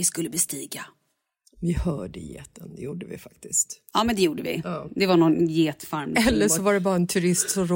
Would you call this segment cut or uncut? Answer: uncut